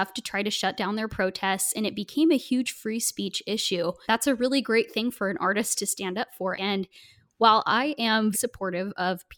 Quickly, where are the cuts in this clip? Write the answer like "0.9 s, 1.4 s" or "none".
4.0 s, 6.5 s, 8.3 s

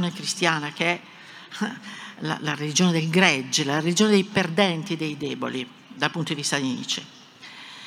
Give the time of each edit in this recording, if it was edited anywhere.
none

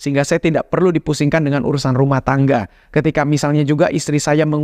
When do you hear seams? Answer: none

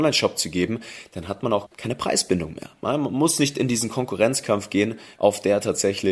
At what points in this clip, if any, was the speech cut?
1.7 s, 5.2 s

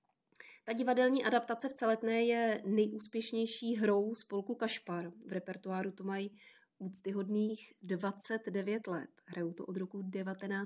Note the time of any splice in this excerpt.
none

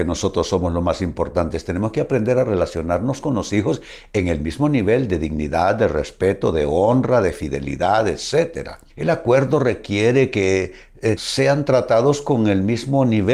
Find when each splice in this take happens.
8.9 s, 11.2 s

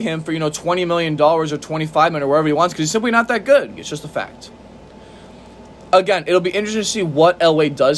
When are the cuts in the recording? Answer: 3.8 s

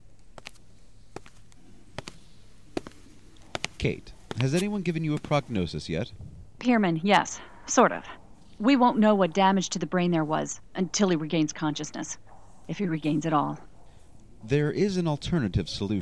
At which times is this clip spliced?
none

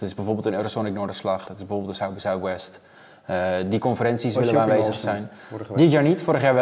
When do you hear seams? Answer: none

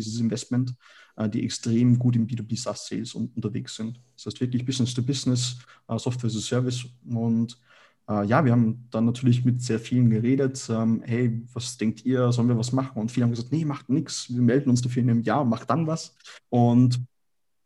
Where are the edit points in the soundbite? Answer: 16.4 s

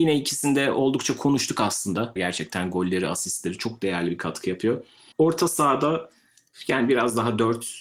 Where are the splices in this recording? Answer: 2.2 s, 5.1 s

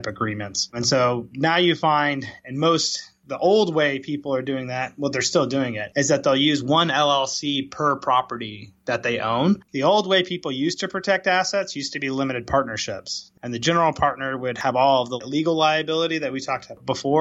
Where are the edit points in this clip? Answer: 9.6 s, 13.4 s

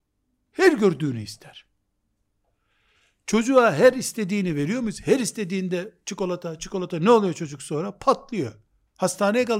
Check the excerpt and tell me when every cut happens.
6.6 s

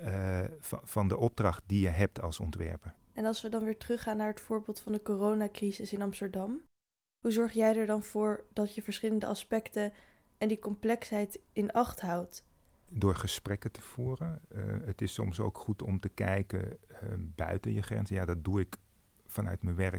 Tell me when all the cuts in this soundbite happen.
none

